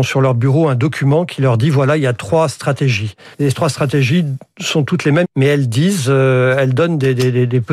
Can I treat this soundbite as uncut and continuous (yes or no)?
no